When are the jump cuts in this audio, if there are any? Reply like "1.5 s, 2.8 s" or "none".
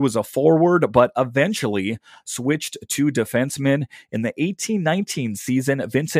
none